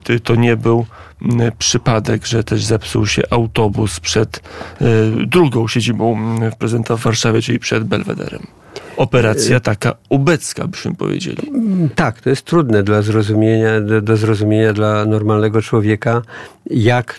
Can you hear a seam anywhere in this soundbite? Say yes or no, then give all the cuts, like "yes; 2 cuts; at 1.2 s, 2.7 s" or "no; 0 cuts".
yes; 1 cut; at 11.9 s